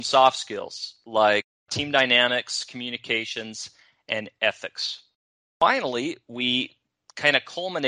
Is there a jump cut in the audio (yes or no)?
no